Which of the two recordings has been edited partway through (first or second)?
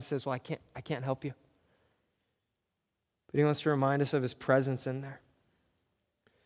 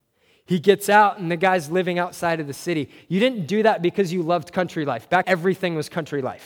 second